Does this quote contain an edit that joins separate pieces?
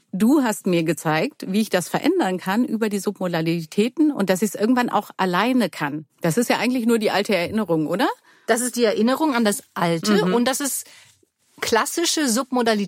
yes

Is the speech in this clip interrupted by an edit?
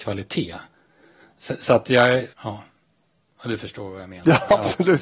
yes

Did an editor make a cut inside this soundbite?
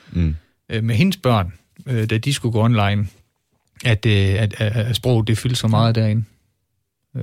no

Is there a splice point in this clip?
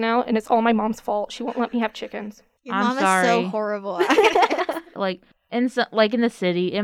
yes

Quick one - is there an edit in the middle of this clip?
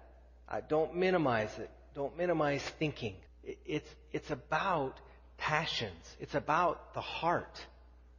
yes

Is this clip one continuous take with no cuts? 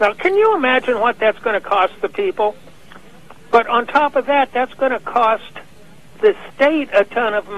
yes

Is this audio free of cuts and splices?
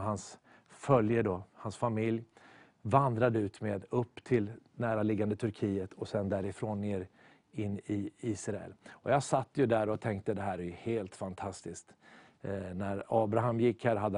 yes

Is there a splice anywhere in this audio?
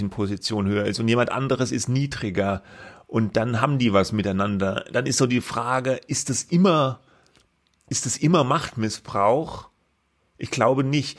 no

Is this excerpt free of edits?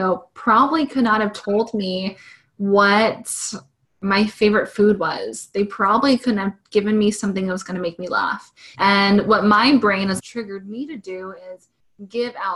no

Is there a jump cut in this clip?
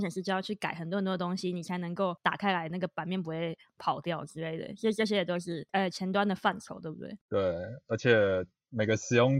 no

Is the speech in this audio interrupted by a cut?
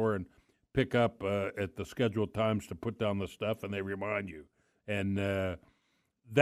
no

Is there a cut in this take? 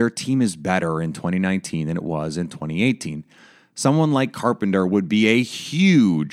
no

